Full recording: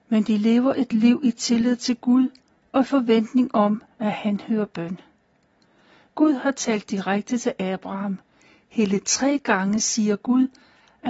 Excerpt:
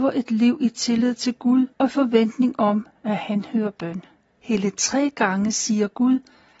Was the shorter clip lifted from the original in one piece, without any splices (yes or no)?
no